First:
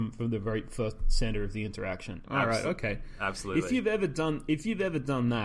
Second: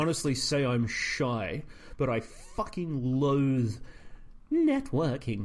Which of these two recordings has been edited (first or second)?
first